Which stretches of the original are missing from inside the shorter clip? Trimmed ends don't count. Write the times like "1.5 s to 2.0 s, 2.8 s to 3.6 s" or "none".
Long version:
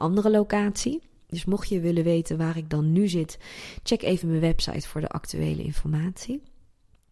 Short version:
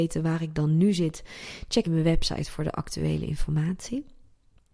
4.0 s to 4.2 s